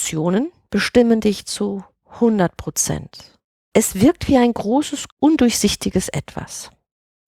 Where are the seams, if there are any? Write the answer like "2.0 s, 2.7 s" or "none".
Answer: 5.1 s